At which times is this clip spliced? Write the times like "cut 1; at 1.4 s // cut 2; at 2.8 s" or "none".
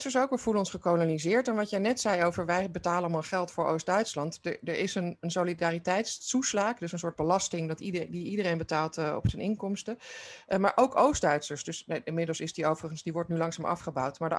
none